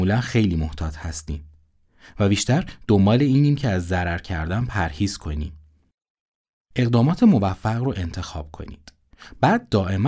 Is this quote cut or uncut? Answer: uncut